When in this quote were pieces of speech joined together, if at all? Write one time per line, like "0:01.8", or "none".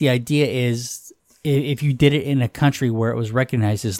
none